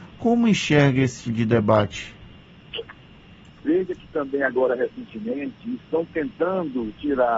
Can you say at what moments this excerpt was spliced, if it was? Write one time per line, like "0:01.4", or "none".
0:01.2
0:03.5